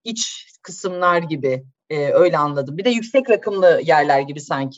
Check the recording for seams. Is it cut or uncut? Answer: uncut